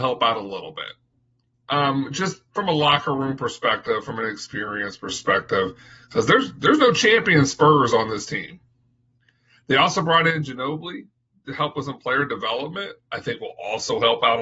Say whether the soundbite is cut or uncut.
uncut